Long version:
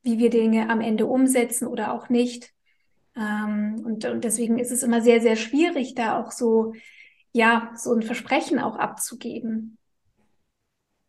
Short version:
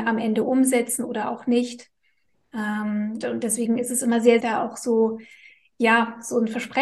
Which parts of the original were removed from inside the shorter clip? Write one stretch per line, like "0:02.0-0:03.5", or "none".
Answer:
0:03.8-0:04.0
0:05.2-0:05.9